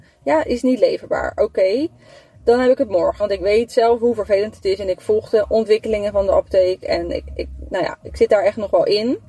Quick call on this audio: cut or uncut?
cut